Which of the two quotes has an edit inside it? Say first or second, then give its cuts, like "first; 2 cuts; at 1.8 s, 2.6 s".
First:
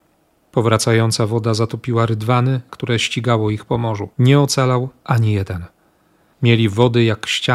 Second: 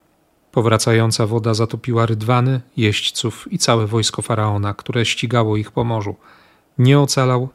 first; 3 cuts; at 2.7 s, 4.1 s, 6.3 s